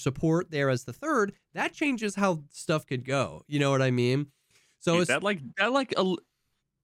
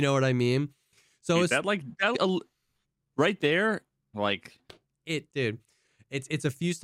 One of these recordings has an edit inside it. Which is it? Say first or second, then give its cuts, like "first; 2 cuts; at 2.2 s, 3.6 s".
second; 2 cuts; at 2.1 s, 4.1 s